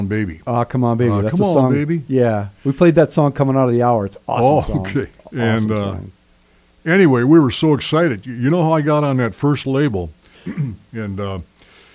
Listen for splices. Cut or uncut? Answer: cut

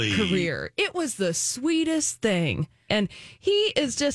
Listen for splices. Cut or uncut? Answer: cut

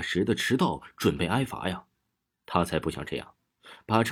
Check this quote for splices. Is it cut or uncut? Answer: uncut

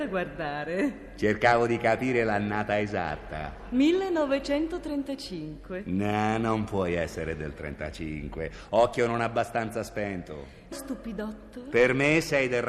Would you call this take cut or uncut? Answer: cut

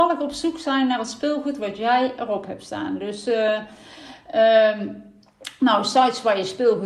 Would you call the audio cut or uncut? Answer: uncut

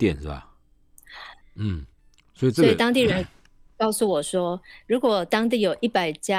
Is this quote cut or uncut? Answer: cut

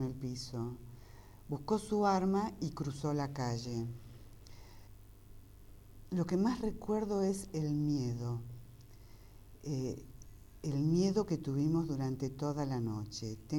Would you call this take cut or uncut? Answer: uncut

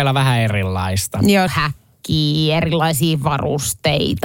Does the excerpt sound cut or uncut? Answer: cut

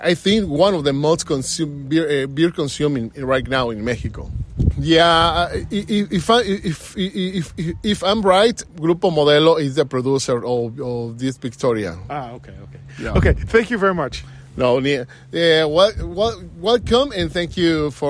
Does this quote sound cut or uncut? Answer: cut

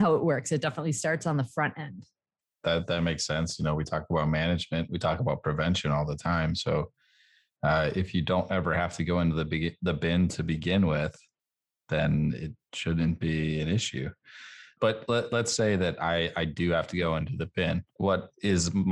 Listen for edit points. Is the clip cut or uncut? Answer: uncut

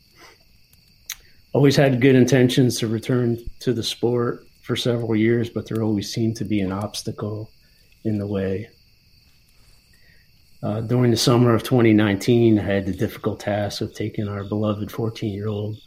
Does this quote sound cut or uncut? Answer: uncut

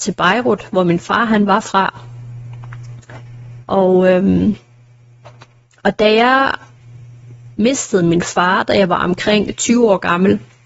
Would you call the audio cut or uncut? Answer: cut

